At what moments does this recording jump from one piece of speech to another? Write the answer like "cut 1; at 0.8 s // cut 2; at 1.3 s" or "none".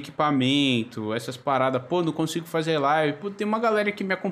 none